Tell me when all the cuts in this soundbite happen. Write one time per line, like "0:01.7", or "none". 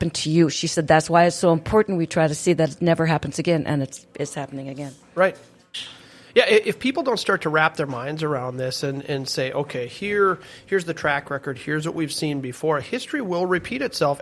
none